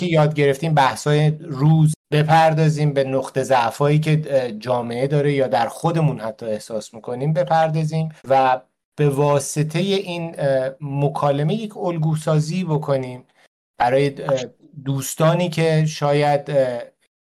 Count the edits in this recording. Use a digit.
2